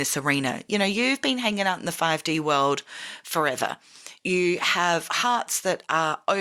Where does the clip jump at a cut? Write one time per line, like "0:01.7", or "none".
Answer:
0:04.2